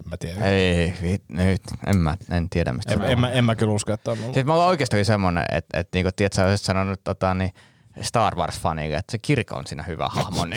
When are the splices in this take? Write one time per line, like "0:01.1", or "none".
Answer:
none